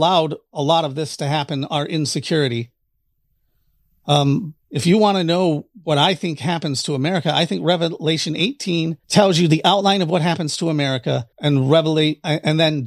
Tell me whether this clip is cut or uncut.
cut